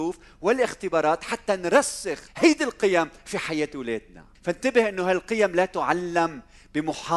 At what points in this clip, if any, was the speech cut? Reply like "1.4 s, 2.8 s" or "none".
2.3 s, 4.4 s